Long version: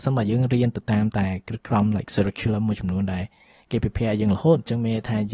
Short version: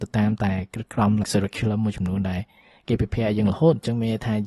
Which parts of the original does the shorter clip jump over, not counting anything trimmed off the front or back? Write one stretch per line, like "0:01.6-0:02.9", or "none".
0:02.0-0:02.1